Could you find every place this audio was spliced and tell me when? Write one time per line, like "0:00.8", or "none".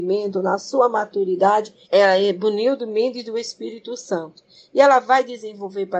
0:01.8